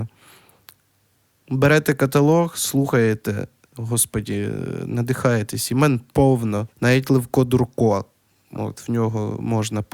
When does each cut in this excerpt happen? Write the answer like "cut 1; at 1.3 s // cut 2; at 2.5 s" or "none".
cut 1; at 6.7 s